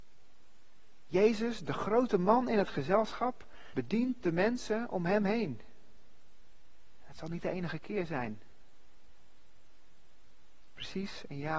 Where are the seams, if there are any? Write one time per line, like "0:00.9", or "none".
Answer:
0:03.7